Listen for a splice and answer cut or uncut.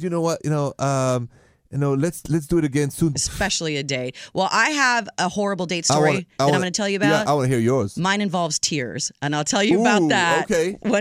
cut